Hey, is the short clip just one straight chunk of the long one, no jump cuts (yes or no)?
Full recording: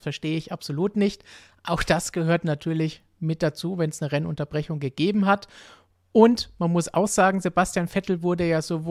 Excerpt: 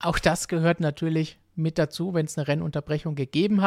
yes